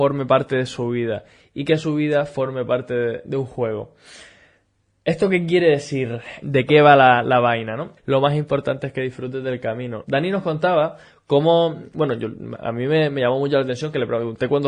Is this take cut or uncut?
cut